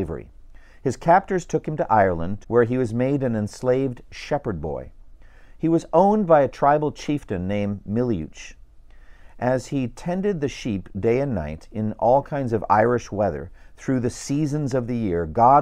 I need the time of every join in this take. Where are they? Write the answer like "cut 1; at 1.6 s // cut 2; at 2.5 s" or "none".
cut 1; at 2.4 s